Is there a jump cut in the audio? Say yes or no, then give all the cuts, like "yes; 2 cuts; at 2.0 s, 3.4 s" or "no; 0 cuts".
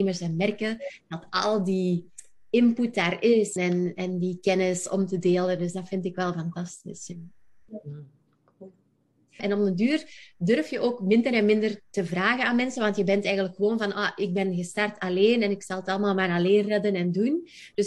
yes; 2 cuts; at 3.6 s, 9.4 s